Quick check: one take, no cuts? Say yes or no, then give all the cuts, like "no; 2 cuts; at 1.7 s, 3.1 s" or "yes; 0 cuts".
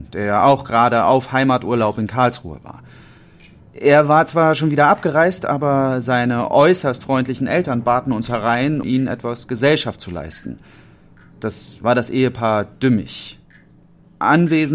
no; 1 cut; at 8.8 s